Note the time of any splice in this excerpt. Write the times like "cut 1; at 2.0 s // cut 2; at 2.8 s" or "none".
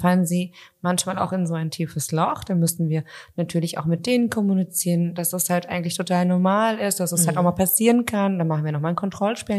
none

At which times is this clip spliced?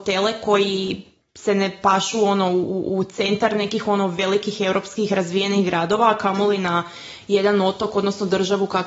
none

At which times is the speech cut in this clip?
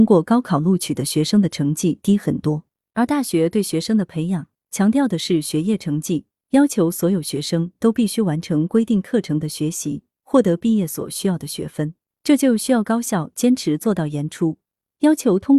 none

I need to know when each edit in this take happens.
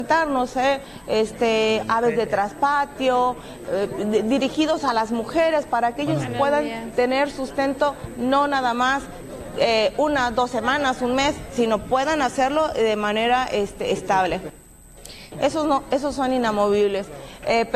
cut 1; at 3.6 s // cut 2; at 15.3 s

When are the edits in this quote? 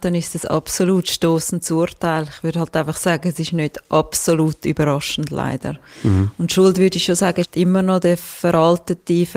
cut 1; at 7.4 s

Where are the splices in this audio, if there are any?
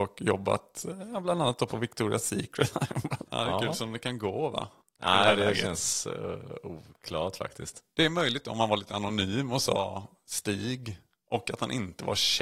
cut 1; at 3.3 s // cut 2; at 4.8 s

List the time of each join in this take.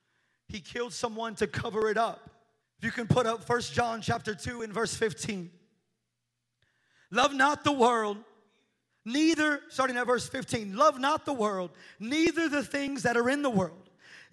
cut 1; at 2.6 s

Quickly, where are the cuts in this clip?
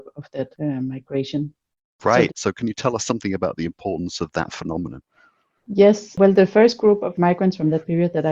cut 1; at 2.3 s

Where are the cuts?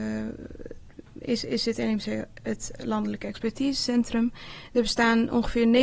none

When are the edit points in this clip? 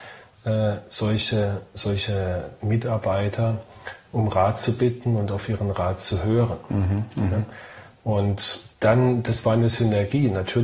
cut 1; at 8.7 s

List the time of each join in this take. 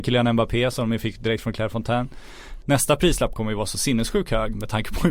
cut 1; at 2.6 s

